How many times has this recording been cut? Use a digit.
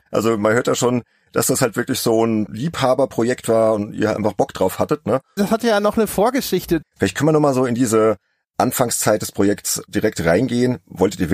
2